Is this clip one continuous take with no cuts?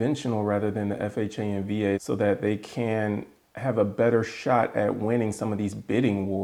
no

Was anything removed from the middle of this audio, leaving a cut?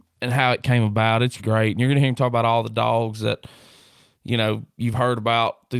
yes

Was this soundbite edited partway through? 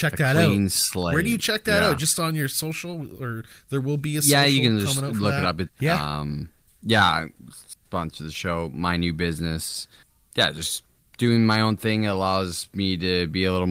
yes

